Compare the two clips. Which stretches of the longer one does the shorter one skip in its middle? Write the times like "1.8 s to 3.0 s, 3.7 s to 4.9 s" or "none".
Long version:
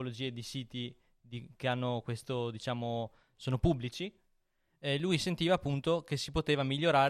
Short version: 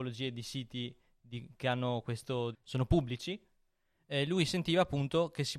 2.5 s to 3.2 s